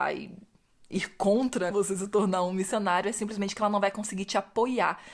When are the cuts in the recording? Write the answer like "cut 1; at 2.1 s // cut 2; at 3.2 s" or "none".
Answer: cut 1; at 1.7 s